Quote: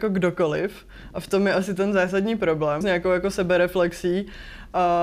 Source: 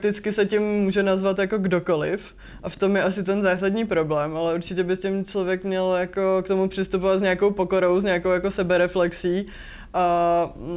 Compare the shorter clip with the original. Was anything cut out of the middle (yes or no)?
yes